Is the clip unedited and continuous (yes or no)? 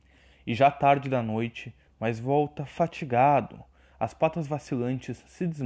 no